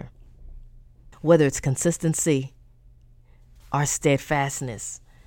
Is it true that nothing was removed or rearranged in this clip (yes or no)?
no